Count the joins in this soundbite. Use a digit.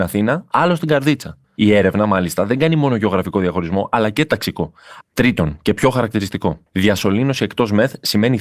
3